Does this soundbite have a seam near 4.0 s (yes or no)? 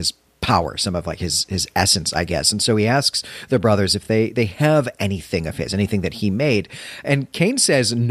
no